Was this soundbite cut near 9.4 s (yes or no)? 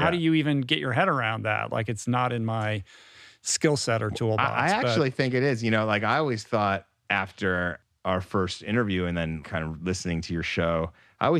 yes